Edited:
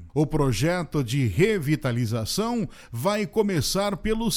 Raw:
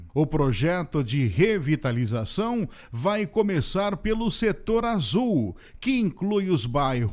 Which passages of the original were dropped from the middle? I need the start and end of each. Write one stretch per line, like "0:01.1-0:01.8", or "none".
none